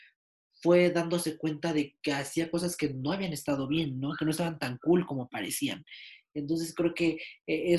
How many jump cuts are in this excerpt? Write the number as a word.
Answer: zero